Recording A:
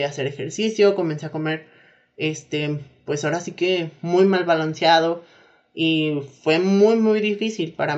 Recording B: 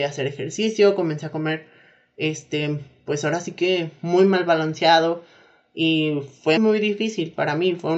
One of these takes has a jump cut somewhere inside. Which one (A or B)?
B